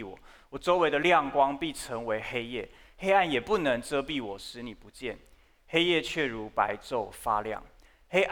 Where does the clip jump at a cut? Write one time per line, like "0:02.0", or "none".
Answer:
none